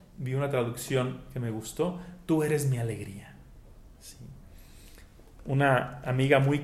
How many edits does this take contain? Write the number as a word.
zero